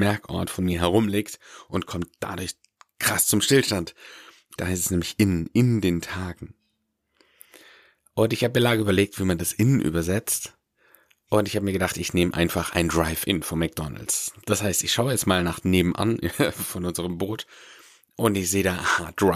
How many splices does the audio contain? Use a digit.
1